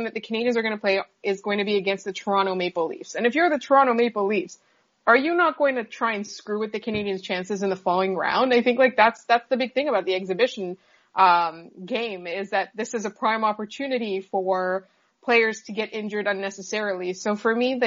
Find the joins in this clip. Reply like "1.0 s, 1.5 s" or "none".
none